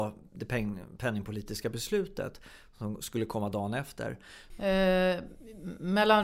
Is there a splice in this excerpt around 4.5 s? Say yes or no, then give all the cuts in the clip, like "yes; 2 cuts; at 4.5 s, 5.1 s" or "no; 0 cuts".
yes; 1 cut; at 4.5 s